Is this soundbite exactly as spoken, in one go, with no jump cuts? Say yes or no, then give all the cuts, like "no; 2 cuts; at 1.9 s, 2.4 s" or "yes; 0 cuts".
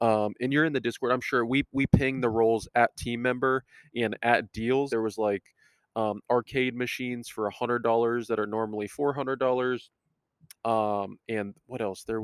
no; 2 cuts; at 4.9 s, 10.5 s